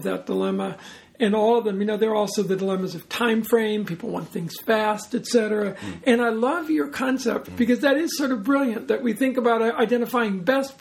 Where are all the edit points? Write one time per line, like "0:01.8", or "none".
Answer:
0:07.4